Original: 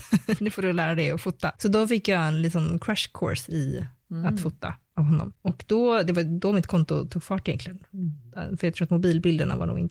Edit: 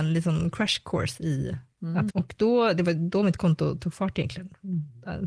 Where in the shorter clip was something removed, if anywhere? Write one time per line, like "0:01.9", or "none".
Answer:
0:02.1